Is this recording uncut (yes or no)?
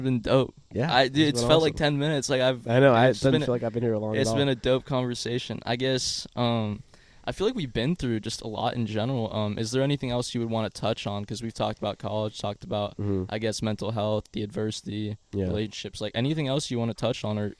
yes